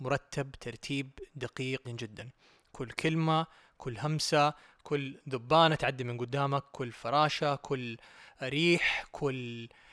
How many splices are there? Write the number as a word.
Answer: one